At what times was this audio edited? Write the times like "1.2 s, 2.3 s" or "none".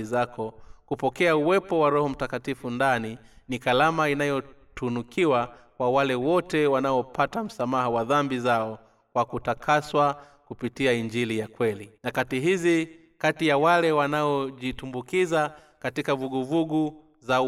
12.0 s